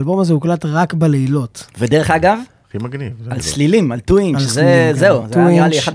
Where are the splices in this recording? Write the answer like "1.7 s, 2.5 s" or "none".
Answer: none